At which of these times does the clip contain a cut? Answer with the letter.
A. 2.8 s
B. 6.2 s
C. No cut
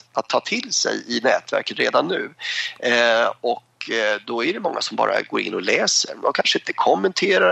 C